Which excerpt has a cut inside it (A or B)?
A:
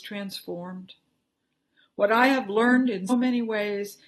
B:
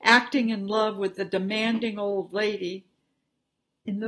A